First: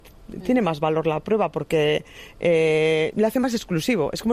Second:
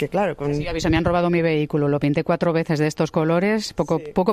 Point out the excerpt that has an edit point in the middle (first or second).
first